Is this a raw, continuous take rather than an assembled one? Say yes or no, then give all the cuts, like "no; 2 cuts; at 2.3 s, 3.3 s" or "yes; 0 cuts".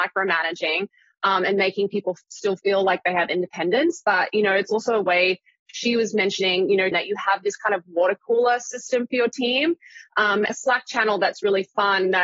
no; 2 cuts; at 6.9 s, 10.5 s